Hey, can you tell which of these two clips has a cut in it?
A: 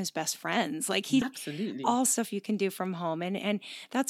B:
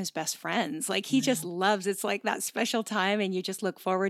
A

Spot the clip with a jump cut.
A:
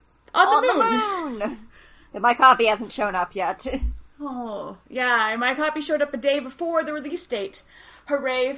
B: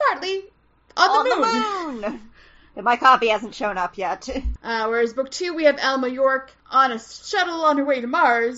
B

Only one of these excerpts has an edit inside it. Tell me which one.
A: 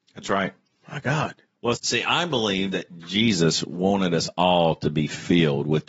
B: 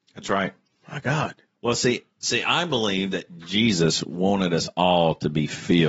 A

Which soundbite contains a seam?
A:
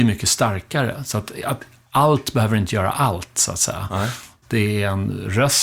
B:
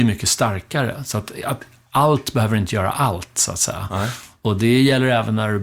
A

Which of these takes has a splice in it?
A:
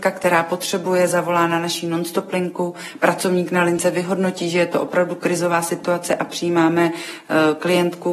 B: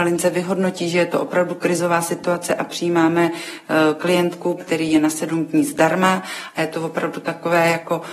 B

